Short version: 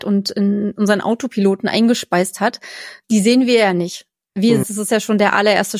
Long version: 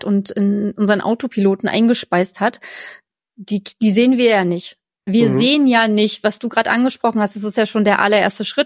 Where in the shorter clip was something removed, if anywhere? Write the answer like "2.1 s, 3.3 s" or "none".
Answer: 3.0 s, 4.6 s

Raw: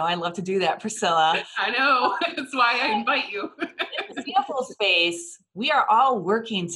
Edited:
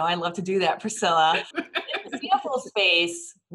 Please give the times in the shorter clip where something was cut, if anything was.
1.5 s

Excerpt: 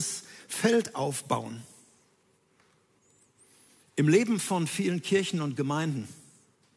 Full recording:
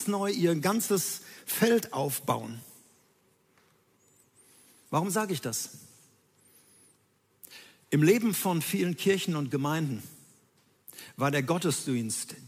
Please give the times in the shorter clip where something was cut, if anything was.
3.8 s

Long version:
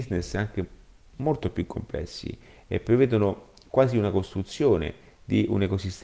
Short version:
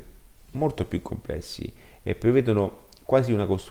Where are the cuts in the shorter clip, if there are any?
none

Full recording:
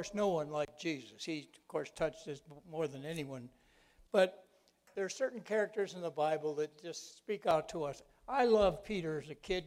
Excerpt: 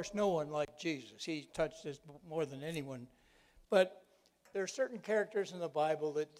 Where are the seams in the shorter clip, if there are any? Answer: 1.5 s

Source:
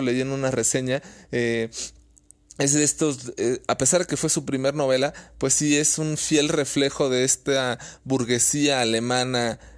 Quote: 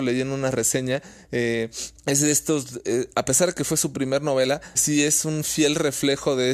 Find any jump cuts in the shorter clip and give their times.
2.0 s, 4.7 s

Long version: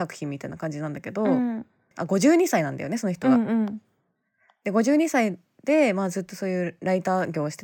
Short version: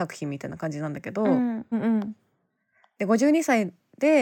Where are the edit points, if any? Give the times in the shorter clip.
1.7 s

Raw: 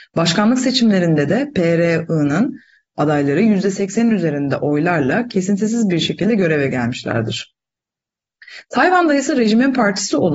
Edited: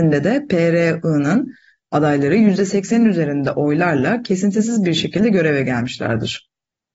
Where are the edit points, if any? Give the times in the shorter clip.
none

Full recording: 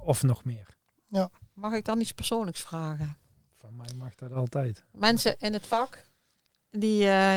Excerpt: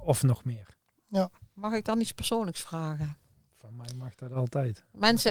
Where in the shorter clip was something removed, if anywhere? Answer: none

